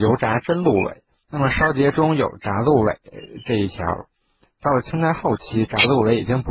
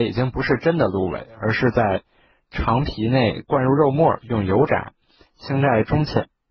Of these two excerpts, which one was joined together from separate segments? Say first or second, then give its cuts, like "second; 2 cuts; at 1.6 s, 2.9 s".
first; 1 cut; at 1.2 s